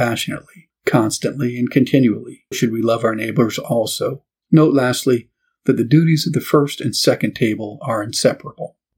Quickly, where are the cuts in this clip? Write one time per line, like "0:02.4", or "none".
0:02.5
0:04.4